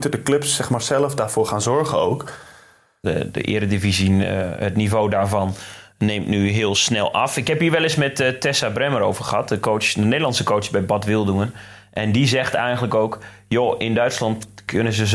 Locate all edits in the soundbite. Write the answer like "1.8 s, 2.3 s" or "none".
3.0 s